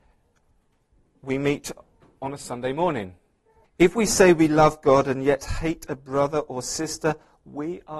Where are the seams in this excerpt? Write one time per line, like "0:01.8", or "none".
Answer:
0:03.6